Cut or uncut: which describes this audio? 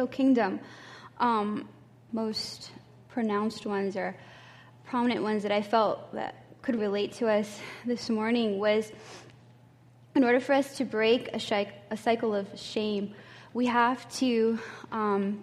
cut